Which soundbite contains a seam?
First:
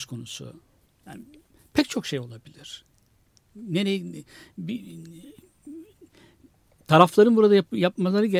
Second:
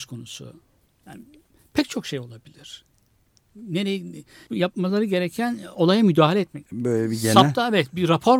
second; 2 cuts; at 4.5 s, 6.7 s

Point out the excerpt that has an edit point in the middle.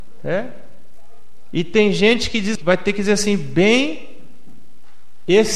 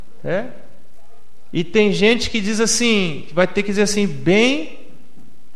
first; 1 cut; at 2.6 s

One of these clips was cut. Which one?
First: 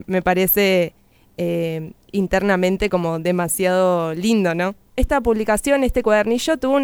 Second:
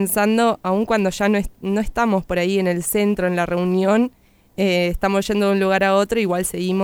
first; 1 cut; at 4.9 s

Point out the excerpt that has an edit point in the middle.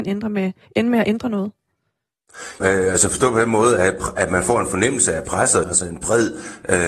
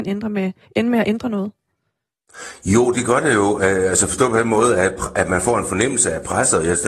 first; 2 cuts; at 2.6 s, 5.6 s

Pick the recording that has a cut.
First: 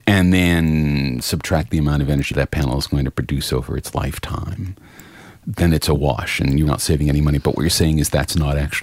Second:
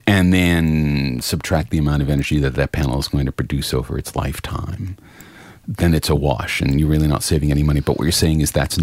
first; 2 cuts; at 2.3 s, 6.7 s

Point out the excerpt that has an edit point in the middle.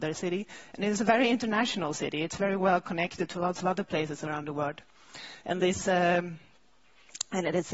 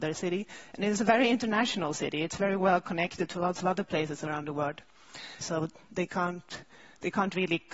second; 1 cut; at 5.4 s

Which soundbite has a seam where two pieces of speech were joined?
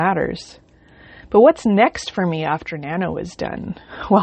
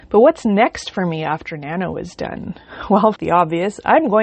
second; 1 cut; at 3.1 s

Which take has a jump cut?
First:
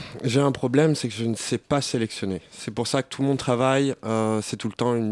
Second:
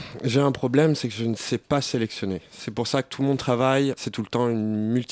second; 1 cut; at 4.0 s

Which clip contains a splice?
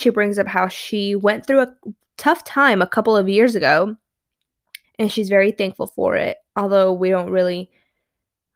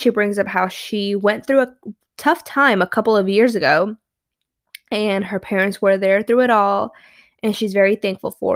first; 2 cuts; at 4.8 s, 6.5 s

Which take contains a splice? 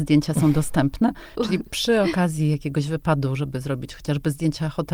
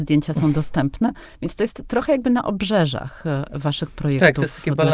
first; 1 cut; at 1.4 s

